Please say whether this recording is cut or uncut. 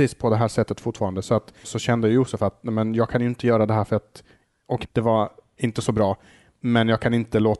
cut